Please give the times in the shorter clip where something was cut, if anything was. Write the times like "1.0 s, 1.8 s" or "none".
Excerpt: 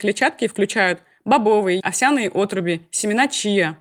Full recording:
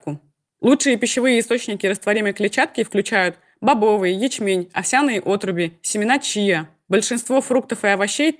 1.8 s